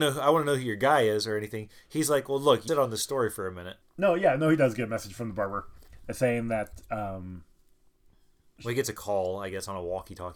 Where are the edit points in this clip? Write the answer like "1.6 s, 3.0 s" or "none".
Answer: 2.7 s, 3.8 s